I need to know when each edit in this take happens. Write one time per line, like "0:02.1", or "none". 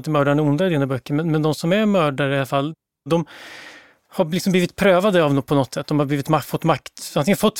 none